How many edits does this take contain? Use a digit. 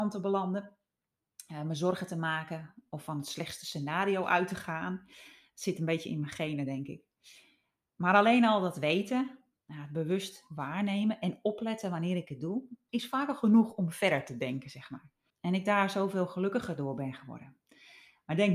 2